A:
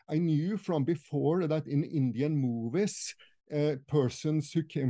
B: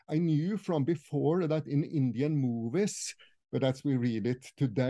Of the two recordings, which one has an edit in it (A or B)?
B